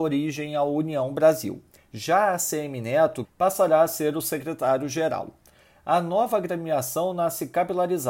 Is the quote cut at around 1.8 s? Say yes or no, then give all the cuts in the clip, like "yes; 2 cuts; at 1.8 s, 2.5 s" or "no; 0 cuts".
yes; 2 cuts; at 1.8 s, 3.2 s